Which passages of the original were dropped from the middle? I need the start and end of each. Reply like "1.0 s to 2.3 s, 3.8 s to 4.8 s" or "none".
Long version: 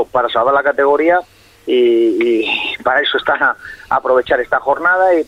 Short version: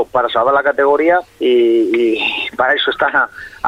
1.3 s to 1.5 s